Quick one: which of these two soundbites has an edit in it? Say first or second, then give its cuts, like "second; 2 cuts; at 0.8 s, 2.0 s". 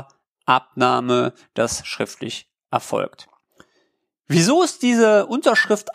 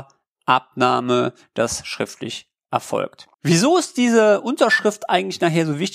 second; 1 cut; at 3.3 s